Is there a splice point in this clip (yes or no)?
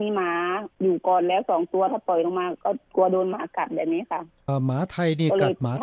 yes